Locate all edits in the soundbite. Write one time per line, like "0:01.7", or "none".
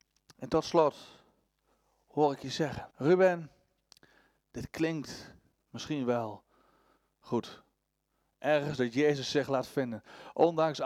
0:02.9